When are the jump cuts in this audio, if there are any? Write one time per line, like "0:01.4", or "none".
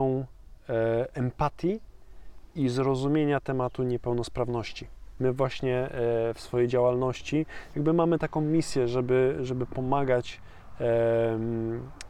0:05.2